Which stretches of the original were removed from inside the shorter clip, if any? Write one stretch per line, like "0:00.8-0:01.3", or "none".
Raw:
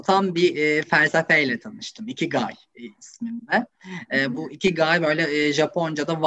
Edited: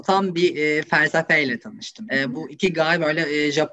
0:02.1-0:04.1